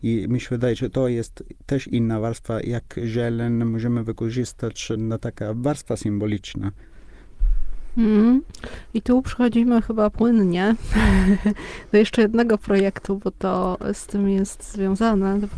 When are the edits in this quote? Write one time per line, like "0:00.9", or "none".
0:05.0